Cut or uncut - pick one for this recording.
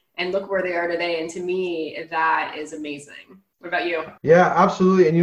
cut